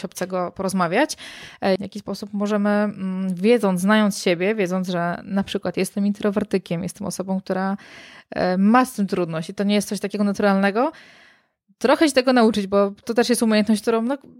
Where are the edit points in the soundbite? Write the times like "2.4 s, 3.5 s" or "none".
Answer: 1.8 s